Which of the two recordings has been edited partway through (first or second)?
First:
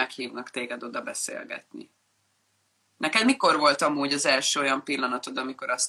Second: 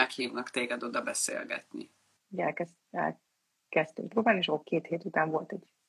second